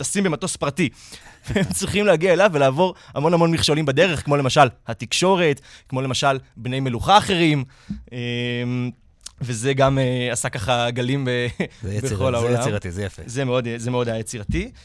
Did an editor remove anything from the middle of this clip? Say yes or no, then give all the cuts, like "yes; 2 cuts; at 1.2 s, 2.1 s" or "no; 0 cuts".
yes; 1 cut; at 1.2 s